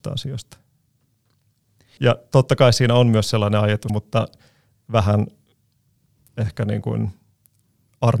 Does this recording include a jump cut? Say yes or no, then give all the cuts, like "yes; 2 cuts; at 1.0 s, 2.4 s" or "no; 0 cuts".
yes; 2 cuts; at 2.0 s, 3.9 s